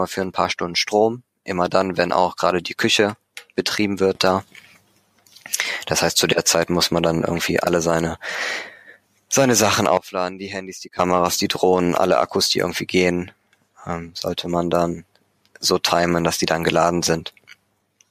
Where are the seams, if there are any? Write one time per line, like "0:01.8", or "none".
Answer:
none